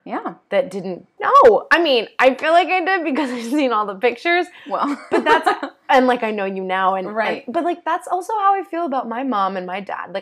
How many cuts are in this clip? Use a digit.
1